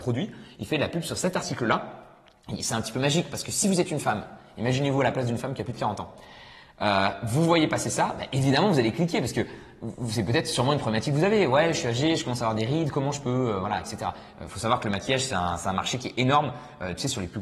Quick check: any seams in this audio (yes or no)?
no